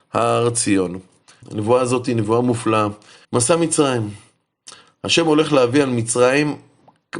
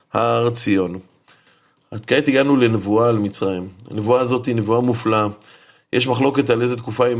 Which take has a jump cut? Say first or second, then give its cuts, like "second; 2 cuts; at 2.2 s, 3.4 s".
first; 2 cuts; at 1.4 s, 3.2 s